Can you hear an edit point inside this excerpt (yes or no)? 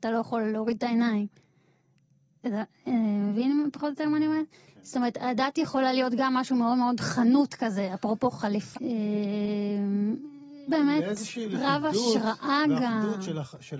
yes